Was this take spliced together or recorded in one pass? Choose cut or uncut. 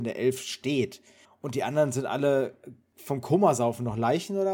cut